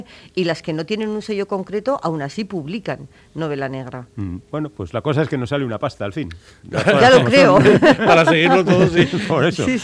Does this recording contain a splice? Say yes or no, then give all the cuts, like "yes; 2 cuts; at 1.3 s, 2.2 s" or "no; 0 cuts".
no; 0 cuts